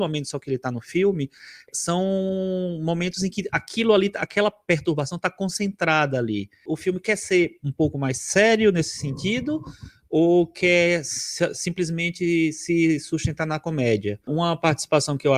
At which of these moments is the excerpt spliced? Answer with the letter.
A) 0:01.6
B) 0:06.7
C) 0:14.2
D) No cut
B